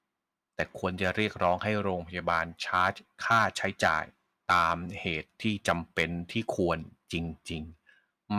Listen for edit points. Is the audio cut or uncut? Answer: uncut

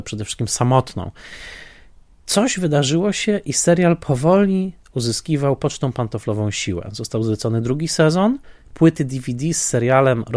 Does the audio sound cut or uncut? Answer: uncut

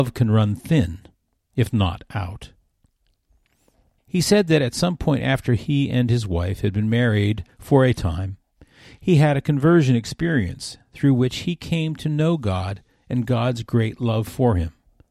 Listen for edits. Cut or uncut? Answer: cut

